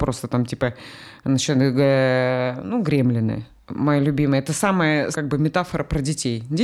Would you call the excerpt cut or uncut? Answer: cut